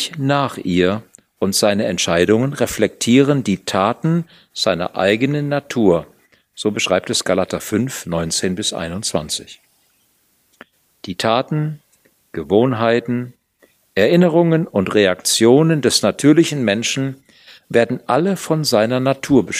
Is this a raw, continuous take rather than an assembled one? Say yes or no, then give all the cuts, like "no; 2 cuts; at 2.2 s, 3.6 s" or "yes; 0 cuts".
yes; 0 cuts